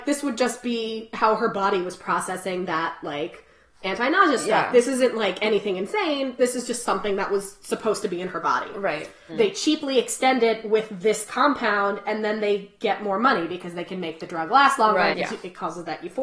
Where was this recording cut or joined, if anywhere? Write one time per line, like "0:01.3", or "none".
0:09.3
0:15.1